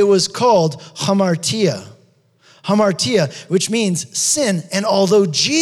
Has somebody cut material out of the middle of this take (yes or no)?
yes